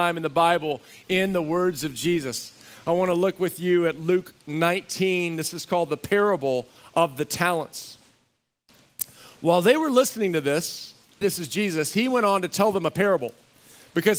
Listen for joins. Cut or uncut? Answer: cut